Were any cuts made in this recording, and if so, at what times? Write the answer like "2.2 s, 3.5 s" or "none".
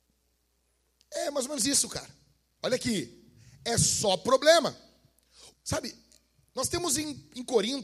2.6 s, 5.5 s